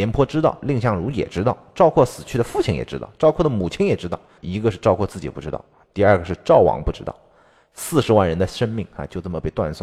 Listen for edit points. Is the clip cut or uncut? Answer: cut